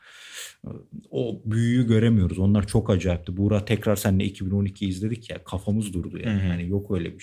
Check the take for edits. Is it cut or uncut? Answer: uncut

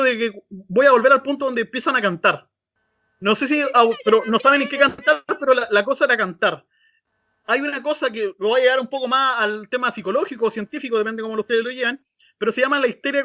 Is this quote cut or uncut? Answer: uncut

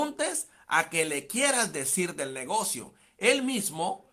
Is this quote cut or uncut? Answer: uncut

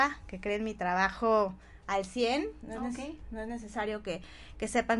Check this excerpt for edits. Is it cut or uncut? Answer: cut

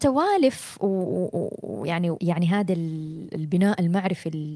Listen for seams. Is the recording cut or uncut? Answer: cut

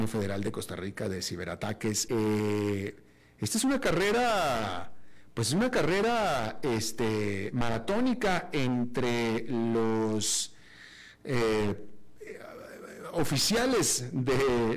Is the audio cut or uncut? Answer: cut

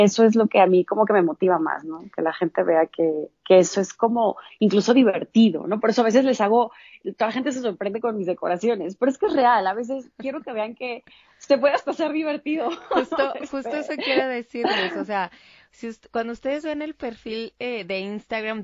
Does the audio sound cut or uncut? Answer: uncut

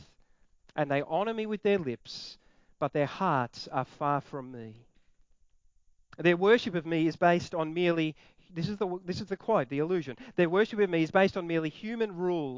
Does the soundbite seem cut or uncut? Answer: uncut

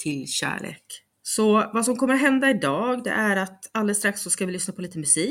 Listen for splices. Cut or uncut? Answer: cut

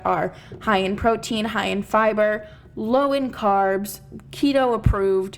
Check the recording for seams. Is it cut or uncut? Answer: uncut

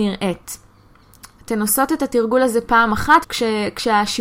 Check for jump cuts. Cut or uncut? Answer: cut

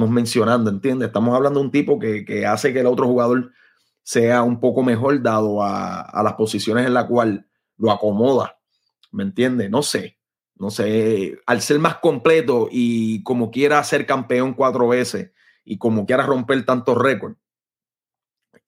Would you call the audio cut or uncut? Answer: uncut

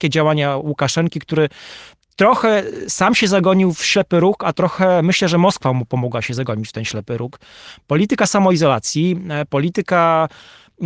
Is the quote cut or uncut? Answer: uncut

